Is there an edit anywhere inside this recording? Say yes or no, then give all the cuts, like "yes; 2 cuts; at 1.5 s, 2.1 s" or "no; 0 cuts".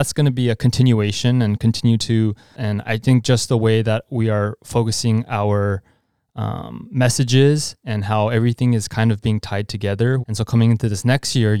yes; 2 cuts; at 2.5 s, 10.2 s